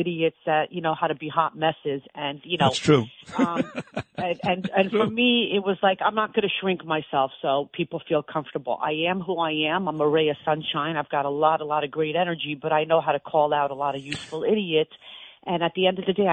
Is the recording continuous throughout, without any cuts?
yes; 0 cuts

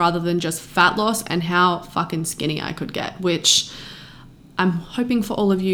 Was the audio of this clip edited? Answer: no; 0 cuts

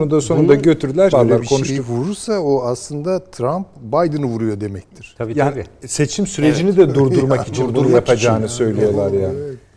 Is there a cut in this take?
yes; 1 cut; at 1.1 s

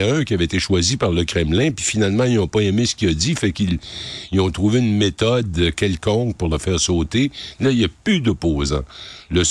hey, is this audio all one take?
yes; 0 cuts

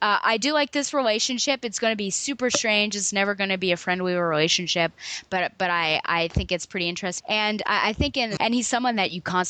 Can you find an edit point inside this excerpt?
yes; 2 cuts; at 7.2 s, 8.4 s

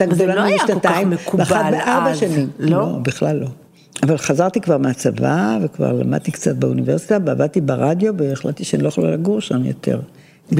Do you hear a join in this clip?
no; 0 cuts

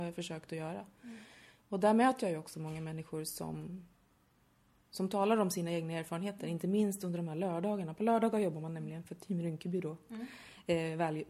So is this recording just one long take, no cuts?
yes; 0 cuts

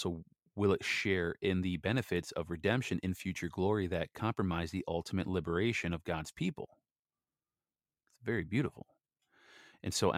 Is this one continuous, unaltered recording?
yes; 0 cuts

